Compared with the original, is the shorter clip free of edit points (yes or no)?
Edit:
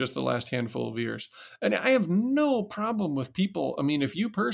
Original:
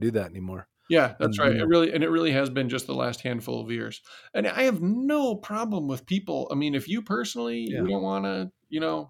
yes